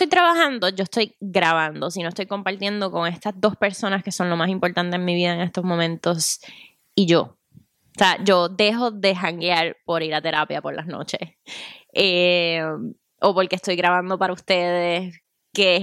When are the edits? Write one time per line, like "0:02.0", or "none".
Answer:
none